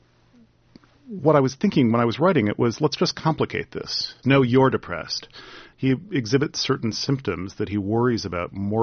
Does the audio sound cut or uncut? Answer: cut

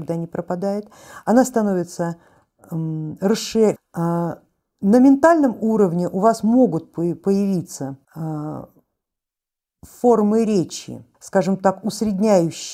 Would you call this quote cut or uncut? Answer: cut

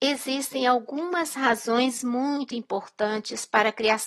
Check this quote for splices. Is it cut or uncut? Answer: uncut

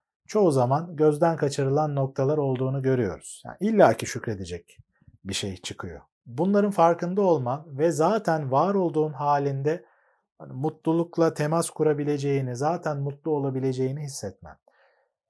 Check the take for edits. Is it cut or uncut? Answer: uncut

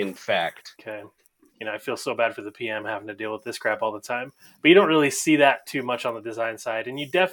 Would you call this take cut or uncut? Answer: cut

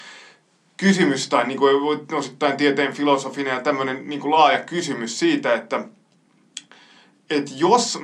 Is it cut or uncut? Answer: uncut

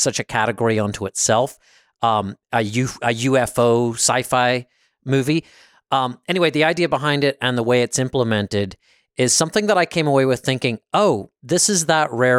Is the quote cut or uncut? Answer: uncut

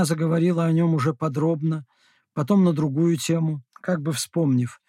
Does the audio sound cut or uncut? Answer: cut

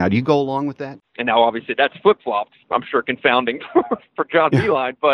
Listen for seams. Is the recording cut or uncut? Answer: cut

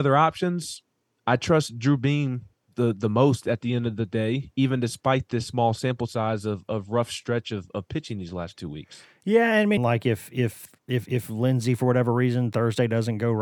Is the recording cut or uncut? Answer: cut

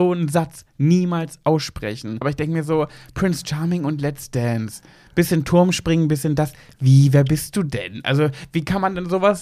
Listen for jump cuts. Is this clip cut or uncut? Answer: cut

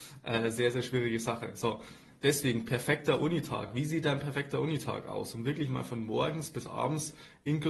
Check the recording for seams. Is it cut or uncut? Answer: uncut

